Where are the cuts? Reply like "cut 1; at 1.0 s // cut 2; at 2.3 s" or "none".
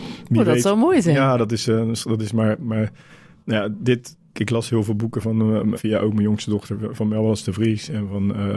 cut 1; at 4.3 s // cut 2; at 5.7 s

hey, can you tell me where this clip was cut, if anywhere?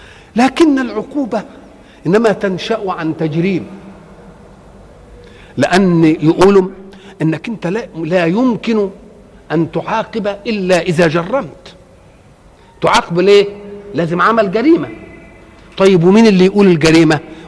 none

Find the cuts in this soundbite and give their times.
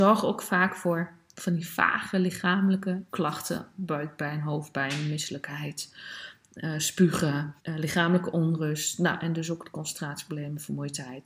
cut 1; at 3.1 s // cut 2; at 7.6 s

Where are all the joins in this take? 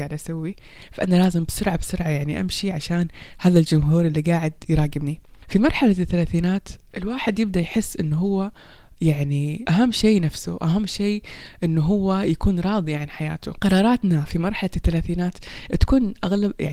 none

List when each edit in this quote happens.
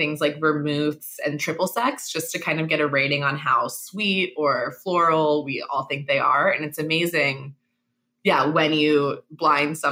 none

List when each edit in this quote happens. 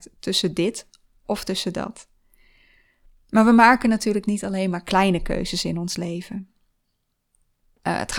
none

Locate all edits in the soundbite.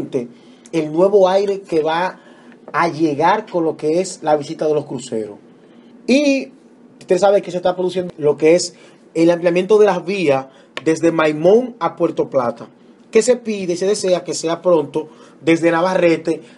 cut 1; at 5.9 s

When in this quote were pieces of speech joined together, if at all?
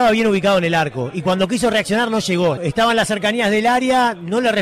cut 1; at 2.6 s

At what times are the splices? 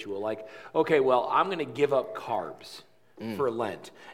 none

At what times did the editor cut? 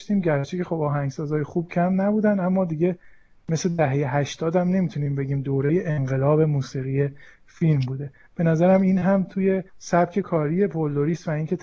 cut 1; at 9.7 s

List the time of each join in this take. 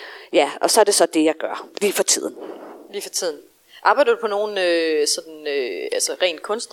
none

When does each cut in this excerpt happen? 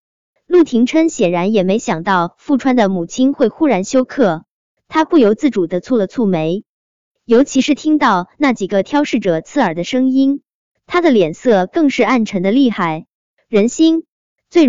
none

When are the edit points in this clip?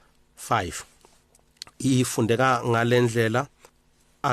none

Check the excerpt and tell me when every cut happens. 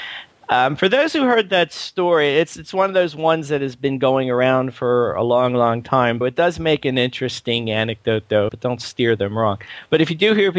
cut 1; at 6.2 s // cut 2; at 8.5 s

